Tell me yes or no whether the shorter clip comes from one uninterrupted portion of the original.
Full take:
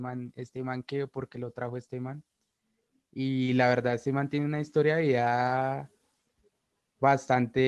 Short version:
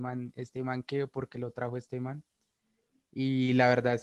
yes